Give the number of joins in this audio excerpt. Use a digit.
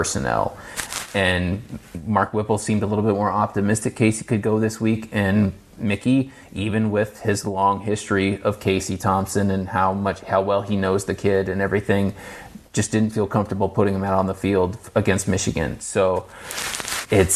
0